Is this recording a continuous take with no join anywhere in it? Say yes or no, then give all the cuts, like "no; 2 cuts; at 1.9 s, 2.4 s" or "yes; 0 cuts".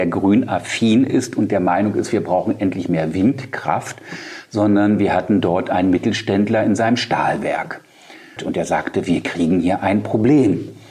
no; 1 cut; at 8.4 s